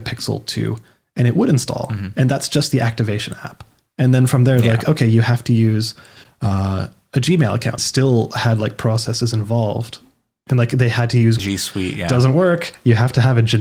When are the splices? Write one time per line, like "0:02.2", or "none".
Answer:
0:07.8
0:11.4